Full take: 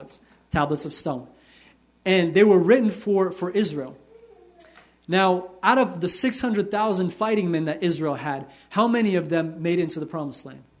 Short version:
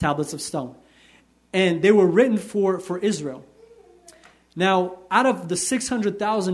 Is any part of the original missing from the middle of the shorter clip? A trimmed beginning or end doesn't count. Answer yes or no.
no